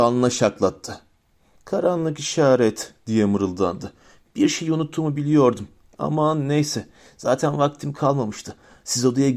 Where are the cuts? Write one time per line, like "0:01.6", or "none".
none